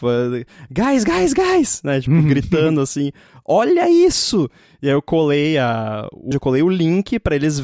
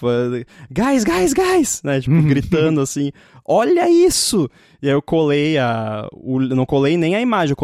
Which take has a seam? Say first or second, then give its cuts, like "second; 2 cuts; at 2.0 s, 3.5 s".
first; 1 cut; at 6.3 s